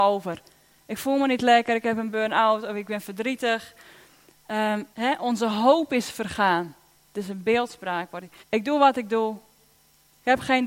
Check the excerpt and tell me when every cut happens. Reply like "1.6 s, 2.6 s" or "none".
4.9 s, 8.4 s